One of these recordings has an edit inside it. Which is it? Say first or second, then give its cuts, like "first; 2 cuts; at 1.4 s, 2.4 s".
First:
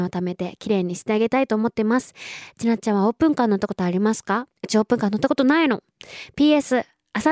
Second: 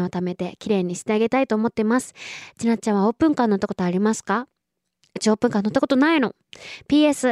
first; 1 cut; at 4.6 s